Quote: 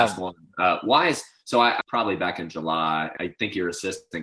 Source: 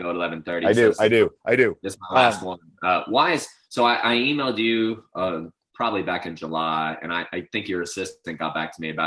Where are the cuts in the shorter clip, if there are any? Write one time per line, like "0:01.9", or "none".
0:01.8
0:03.2